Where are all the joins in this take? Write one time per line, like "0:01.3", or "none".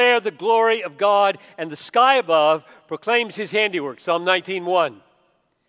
none